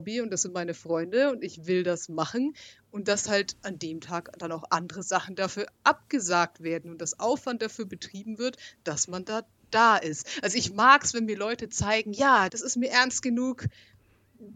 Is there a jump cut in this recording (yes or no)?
yes